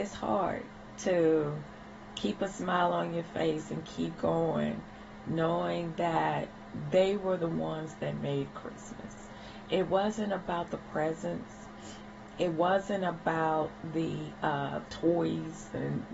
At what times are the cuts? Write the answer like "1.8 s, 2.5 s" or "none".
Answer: none